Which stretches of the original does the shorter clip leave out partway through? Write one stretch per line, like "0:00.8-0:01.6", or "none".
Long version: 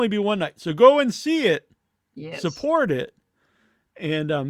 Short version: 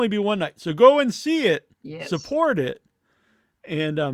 0:01.7-0:02.1